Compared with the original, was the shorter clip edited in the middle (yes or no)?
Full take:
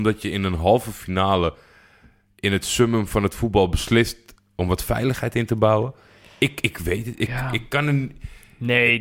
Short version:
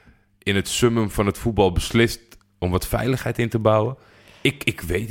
no